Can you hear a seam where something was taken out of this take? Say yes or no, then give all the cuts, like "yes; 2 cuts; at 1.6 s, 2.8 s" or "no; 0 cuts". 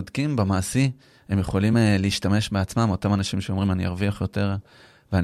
no; 0 cuts